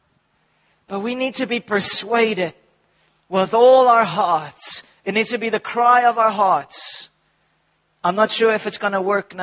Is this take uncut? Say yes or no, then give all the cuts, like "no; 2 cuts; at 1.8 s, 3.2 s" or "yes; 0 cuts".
yes; 0 cuts